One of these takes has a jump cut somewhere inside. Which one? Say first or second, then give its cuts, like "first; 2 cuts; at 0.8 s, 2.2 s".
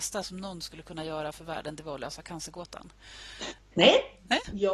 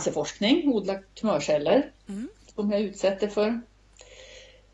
first; 1 cut; at 3.6 s